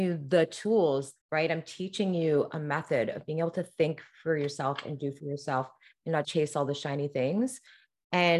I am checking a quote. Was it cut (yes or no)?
yes